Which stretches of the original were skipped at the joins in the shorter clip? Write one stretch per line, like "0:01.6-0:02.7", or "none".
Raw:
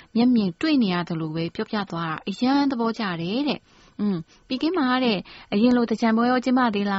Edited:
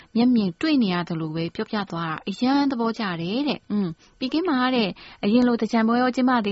0:03.6-0:03.9